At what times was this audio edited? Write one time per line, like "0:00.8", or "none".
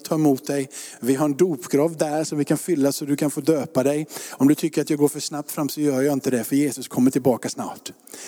none